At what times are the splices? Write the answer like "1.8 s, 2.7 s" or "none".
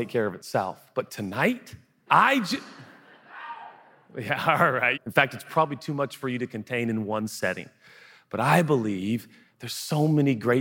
2.1 s, 4.9 s